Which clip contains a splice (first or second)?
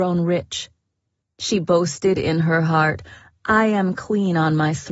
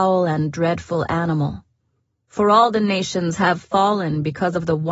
first